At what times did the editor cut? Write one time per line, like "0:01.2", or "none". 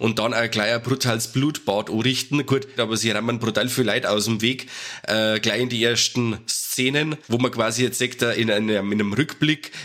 0:02.8